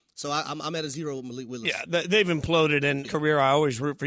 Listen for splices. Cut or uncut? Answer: cut